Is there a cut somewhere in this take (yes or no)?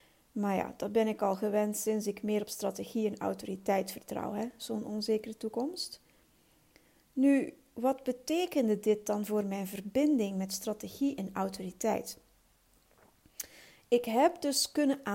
no